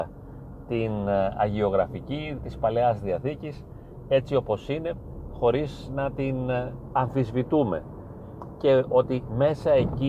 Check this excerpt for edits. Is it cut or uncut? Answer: cut